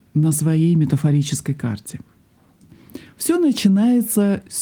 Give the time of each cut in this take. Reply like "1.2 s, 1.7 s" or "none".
none